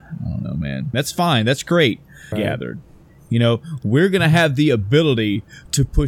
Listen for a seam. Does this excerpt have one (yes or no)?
yes